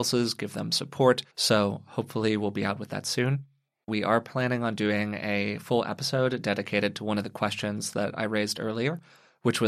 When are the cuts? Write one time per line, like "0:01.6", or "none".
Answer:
0:01.3
0:03.9